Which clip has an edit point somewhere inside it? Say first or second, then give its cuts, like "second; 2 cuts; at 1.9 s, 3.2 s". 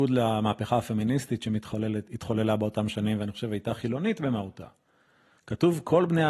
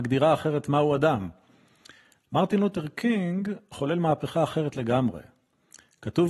first; 1 cut; at 5.4 s